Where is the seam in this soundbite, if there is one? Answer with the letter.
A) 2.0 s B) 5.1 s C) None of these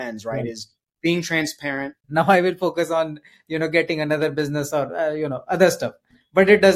A